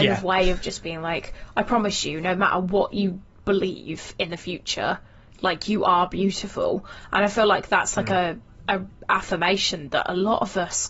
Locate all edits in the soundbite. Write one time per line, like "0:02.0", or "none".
none